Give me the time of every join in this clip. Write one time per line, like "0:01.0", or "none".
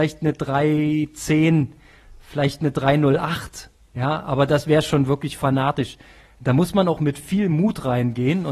none